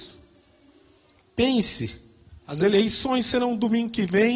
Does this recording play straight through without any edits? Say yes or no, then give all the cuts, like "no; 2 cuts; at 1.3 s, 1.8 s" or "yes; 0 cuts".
no; 1 cut; at 1.2 s